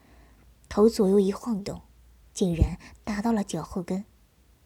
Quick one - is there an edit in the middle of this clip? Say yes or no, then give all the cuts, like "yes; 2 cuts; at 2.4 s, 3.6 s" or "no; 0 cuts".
yes; 1 cut; at 2.2 s